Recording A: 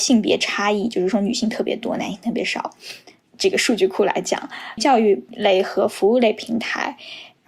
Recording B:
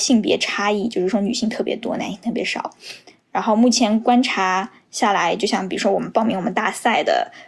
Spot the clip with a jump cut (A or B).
A